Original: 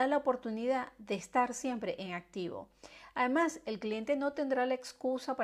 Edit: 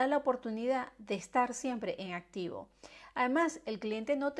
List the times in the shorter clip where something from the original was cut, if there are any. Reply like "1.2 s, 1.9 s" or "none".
none